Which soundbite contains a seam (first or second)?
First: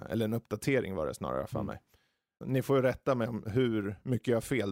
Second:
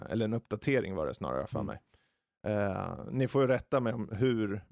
first